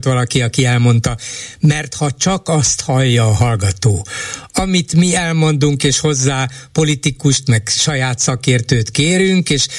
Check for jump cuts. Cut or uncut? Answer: uncut